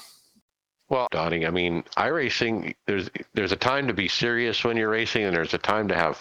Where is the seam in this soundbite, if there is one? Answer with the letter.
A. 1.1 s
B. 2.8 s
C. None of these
A